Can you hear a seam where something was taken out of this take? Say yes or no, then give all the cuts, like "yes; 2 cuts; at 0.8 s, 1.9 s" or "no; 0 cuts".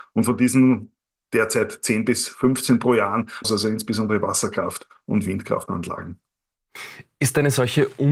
yes; 1 cut; at 3.4 s